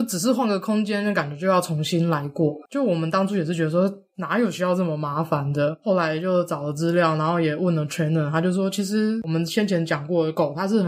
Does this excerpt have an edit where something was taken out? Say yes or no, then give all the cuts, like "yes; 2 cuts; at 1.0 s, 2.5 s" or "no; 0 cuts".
yes; 1 cut; at 2.7 s